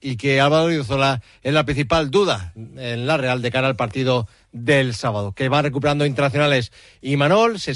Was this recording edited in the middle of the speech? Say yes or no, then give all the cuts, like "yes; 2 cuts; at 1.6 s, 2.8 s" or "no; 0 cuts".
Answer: no; 0 cuts